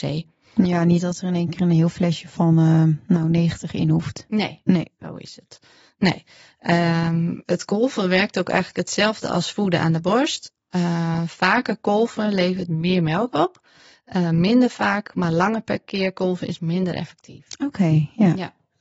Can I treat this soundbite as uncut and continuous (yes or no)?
yes